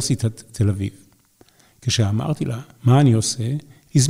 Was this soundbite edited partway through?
no; 0 cuts

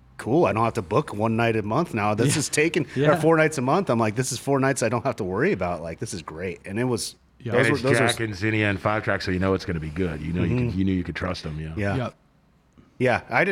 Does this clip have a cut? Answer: no; 0 cuts

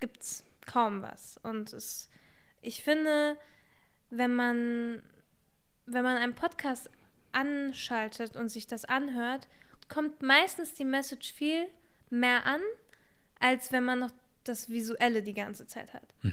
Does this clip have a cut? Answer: yes; 1 cut; at 9.8 s

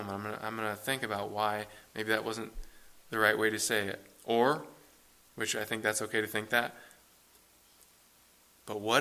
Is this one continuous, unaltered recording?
yes; 0 cuts

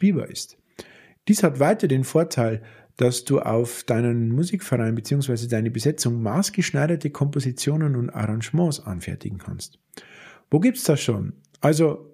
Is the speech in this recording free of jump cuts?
no; 1 cut; at 1.2 s

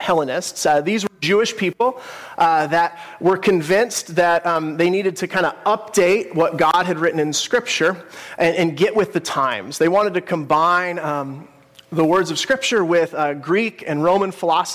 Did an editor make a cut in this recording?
no; 0 cuts

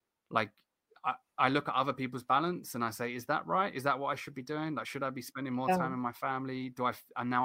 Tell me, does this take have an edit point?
no; 0 cuts

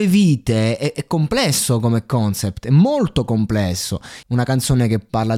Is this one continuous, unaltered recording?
no; 1 cut; at 4.2 s

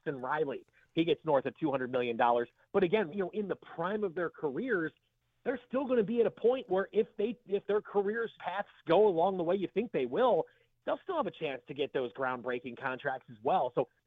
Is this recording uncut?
no; 2 cuts; at 3.1 s, 8.4 s

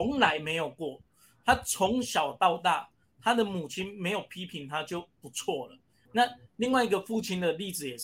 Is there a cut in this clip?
yes; 1 cut; at 6.1 s

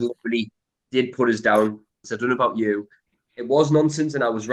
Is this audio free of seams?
no; 1 cut; at 2.0 s

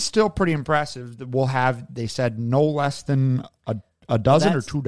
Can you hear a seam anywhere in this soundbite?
no; 0 cuts

